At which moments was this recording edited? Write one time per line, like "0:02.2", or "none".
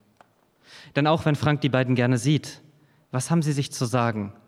none